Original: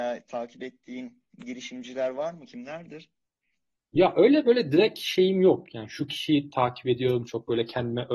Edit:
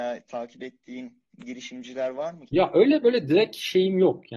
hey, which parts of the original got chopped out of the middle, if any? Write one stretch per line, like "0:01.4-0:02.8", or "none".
0:02.5-0:03.9